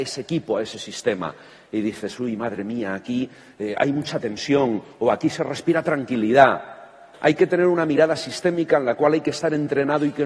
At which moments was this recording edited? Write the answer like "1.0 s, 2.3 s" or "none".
7.1 s